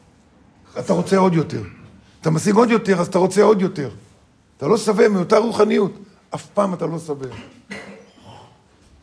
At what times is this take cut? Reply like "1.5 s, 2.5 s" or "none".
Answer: none